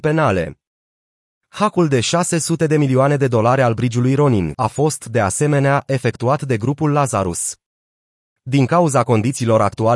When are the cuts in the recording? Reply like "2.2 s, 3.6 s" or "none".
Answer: 4.5 s